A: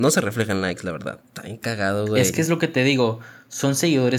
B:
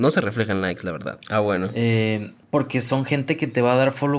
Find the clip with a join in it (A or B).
B